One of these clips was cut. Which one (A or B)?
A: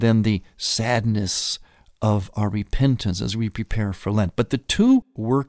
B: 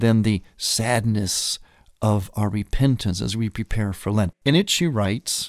B